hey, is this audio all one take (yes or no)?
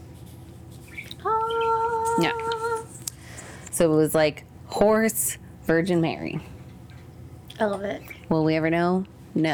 yes